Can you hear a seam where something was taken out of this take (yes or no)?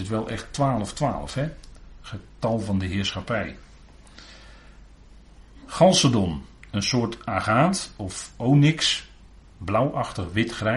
no